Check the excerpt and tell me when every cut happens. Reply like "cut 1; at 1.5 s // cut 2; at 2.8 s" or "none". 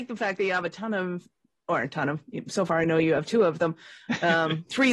none